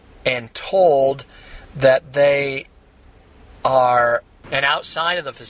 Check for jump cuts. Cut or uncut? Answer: cut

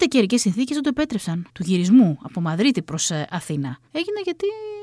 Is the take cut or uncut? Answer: cut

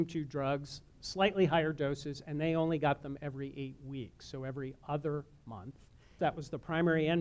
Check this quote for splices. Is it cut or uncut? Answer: cut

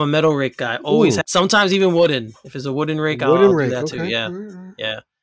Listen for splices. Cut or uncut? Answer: cut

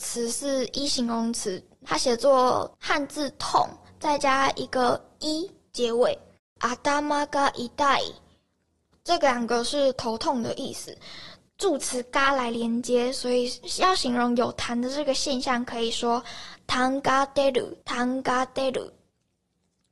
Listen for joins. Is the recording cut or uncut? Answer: cut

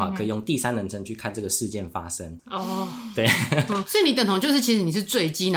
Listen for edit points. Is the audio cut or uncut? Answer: cut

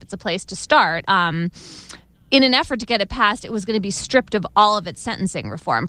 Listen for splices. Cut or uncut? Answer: cut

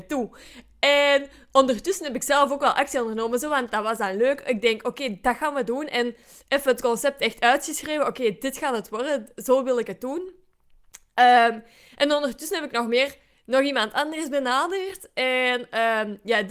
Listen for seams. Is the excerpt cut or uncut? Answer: uncut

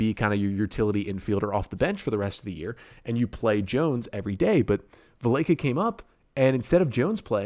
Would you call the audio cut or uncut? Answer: uncut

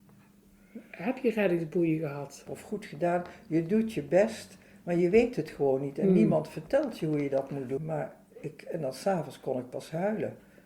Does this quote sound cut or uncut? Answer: cut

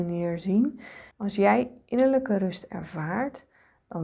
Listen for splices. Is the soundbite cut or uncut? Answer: cut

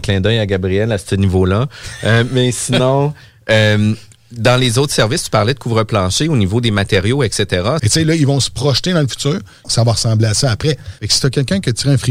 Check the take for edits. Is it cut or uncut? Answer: cut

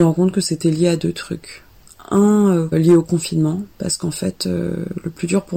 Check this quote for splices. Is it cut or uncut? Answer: cut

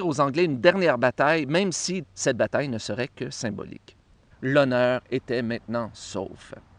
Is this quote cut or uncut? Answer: cut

